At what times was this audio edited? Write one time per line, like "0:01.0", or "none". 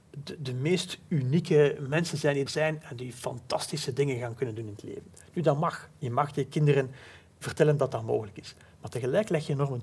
0:02.5